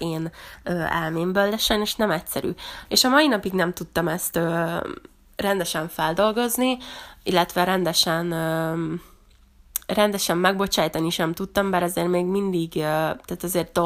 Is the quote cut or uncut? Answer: cut